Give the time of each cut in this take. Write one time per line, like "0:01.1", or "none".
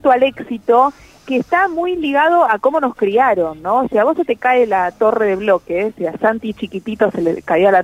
none